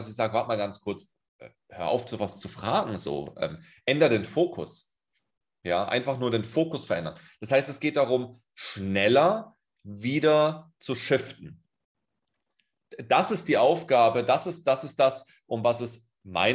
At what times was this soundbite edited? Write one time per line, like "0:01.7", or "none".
none